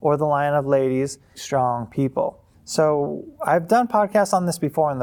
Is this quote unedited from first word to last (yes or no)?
no